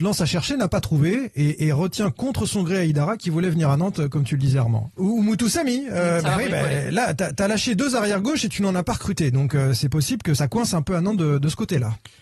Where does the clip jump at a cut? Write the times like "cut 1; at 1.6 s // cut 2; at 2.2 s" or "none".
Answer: cut 1; at 5.0 s // cut 2; at 10.4 s